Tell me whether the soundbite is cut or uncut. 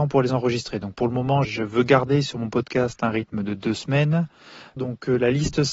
cut